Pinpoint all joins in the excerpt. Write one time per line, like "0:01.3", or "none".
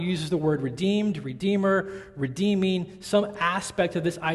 none